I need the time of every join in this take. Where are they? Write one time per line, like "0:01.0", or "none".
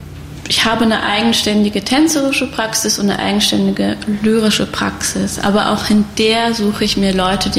none